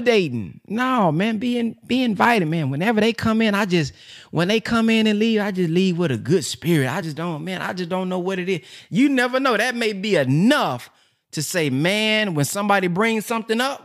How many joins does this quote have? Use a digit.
0